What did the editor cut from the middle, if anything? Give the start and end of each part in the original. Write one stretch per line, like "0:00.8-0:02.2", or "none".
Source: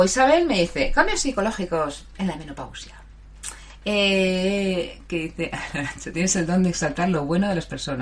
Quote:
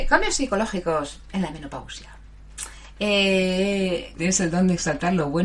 0:05.0-0:06.1